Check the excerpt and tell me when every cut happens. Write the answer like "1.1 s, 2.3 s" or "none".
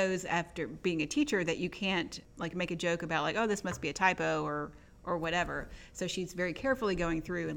none

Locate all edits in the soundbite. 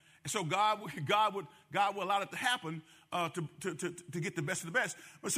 none

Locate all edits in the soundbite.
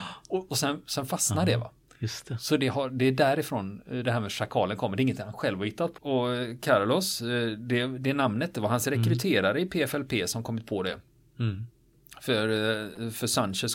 6.0 s

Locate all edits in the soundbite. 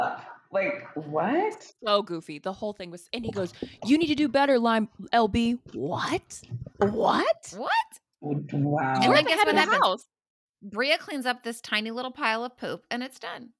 none

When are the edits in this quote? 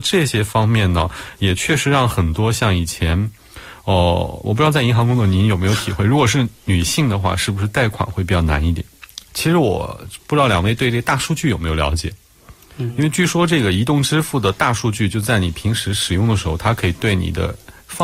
9.3 s

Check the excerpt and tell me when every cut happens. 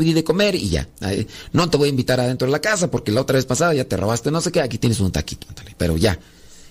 none

